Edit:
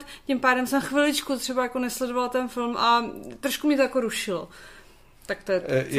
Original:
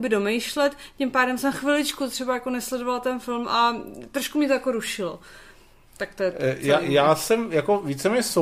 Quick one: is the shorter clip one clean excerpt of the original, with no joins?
yes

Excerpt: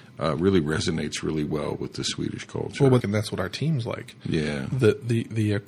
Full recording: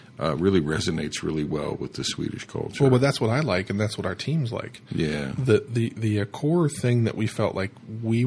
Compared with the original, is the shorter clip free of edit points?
no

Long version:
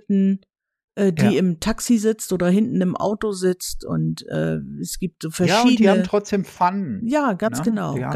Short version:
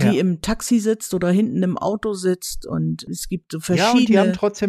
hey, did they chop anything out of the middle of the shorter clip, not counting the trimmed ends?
yes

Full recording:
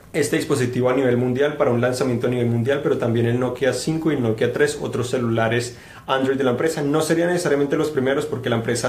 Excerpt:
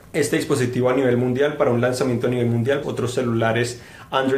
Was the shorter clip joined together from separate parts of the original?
yes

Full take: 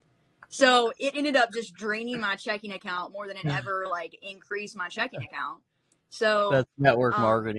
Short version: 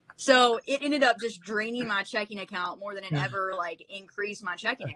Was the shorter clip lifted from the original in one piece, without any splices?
yes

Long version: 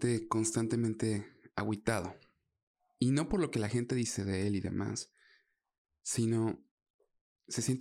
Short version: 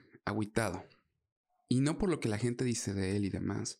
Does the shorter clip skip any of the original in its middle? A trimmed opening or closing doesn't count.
no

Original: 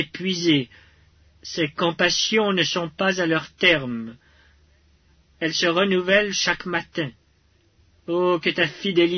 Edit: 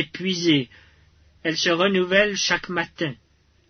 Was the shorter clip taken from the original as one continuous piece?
no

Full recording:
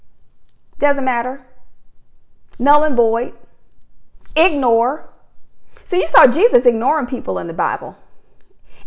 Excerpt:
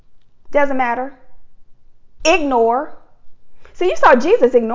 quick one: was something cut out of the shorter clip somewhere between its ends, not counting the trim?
yes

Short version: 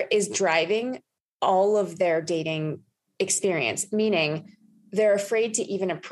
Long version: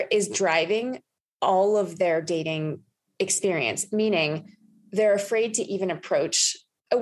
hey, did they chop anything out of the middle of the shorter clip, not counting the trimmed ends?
no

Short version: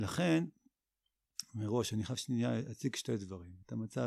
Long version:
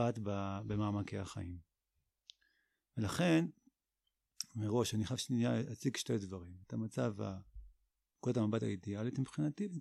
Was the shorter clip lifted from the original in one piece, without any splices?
yes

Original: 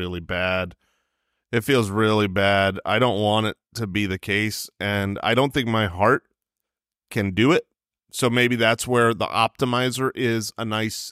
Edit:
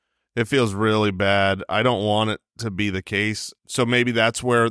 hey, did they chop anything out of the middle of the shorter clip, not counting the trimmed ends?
yes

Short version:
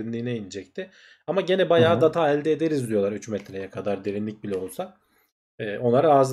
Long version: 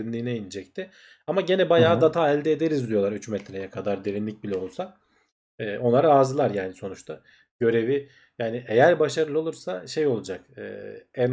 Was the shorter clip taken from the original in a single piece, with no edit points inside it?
yes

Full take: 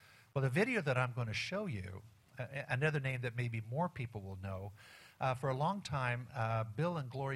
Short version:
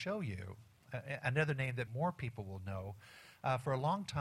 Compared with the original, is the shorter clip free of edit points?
no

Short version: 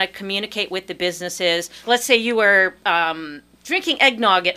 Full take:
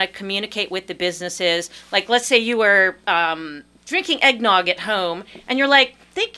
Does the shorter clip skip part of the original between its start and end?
yes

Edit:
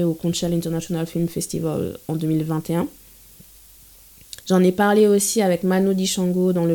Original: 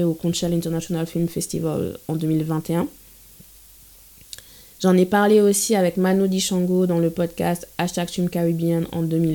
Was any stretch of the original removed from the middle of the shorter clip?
yes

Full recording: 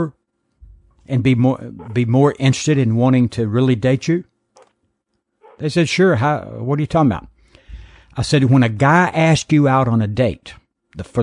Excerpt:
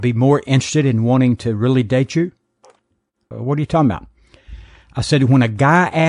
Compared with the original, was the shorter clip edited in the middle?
yes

